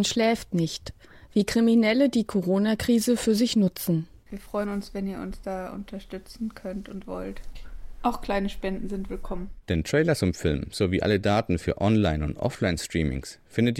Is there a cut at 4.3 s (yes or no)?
yes